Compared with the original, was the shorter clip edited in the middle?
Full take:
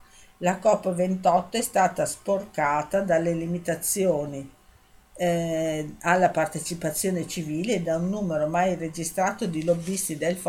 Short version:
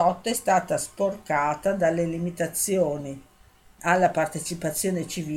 yes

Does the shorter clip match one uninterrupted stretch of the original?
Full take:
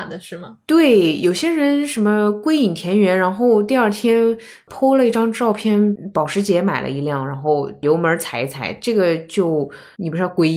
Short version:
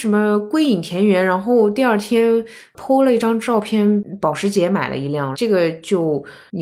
no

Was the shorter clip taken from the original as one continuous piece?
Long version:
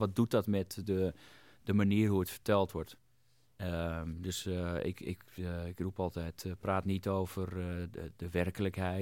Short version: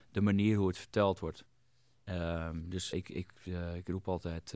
no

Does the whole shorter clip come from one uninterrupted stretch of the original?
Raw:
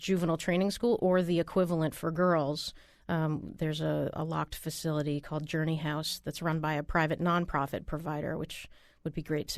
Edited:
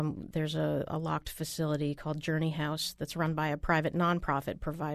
yes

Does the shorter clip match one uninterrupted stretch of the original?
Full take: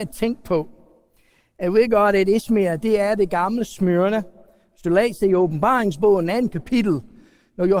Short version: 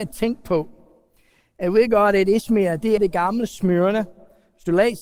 no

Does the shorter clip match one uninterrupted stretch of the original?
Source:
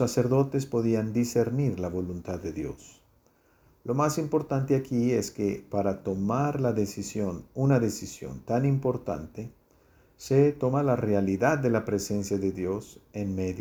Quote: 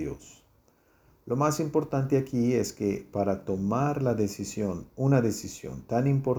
yes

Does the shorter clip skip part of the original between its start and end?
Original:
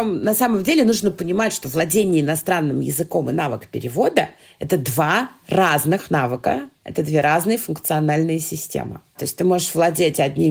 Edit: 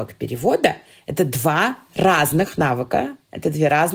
no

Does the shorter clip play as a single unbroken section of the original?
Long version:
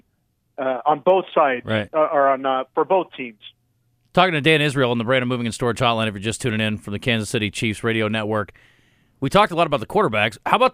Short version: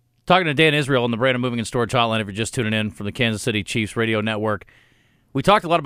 yes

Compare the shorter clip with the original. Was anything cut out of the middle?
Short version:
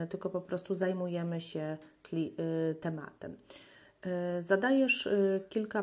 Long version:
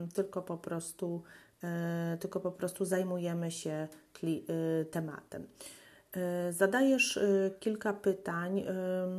no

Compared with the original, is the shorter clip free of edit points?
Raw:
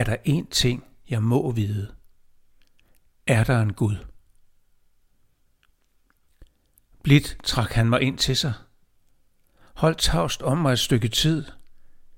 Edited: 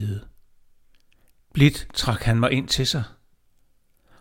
no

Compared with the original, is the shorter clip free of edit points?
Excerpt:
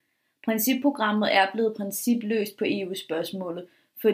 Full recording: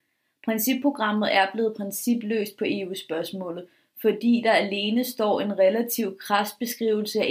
yes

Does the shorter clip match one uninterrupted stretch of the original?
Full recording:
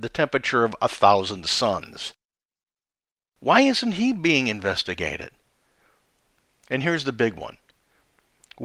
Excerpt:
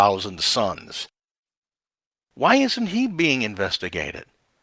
yes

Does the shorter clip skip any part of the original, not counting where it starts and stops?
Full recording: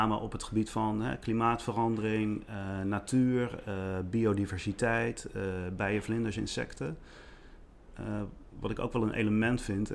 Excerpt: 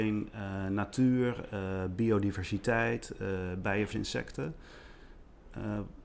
yes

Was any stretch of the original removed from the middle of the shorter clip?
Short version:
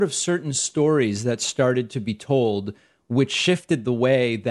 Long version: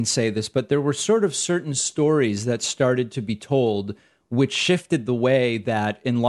no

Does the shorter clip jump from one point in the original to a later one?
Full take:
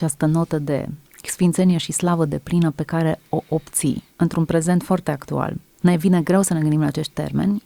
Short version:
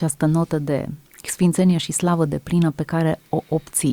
no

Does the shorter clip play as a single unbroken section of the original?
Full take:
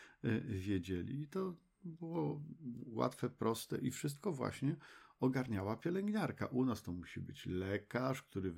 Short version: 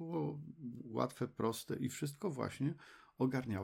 yes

